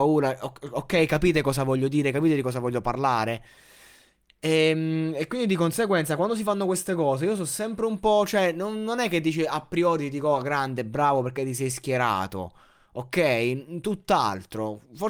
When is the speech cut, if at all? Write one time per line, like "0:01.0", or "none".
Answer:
none